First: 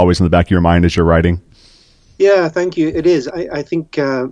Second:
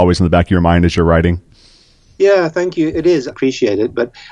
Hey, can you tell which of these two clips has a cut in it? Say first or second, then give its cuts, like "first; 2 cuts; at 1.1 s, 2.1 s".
second; 1 cut; at 3.3 s